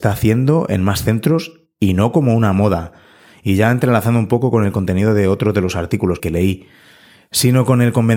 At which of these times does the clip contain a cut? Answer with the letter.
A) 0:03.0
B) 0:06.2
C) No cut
B